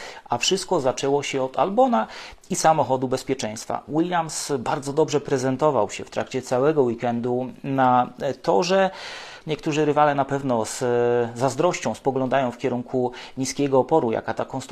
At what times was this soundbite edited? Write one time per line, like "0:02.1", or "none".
0:09.4